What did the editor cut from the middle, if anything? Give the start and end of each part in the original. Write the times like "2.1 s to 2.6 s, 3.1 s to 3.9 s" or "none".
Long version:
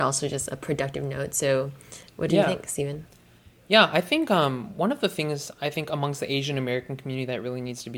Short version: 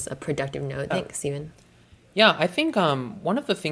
1.3 s to 2.4 s